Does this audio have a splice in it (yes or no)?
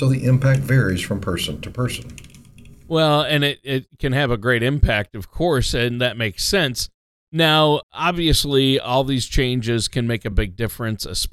yes